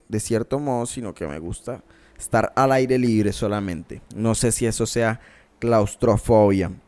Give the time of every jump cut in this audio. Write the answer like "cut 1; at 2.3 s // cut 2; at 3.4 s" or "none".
cut 1; at 4.1 s